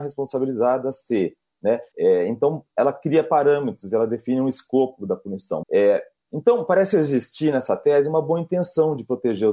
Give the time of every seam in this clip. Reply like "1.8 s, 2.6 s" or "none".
1.9 s, 5.6 s